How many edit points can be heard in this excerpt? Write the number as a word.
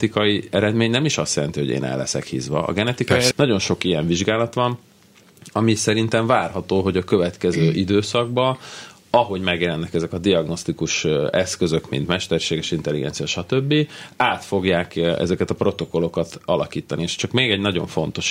one